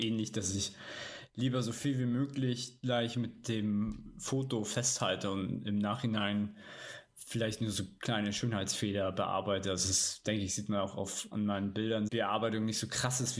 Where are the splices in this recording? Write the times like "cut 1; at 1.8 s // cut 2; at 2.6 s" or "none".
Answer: cut 1; at 12.1 s